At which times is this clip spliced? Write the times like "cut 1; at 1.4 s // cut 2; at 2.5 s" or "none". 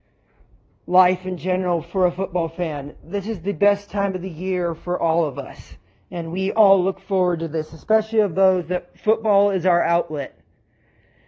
none